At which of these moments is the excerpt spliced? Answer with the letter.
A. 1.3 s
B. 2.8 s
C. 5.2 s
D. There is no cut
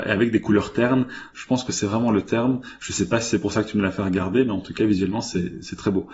A